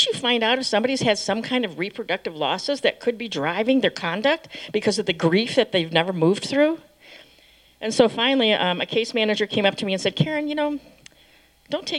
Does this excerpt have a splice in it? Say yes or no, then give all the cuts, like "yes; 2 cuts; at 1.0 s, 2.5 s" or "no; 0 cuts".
no; 0 cuts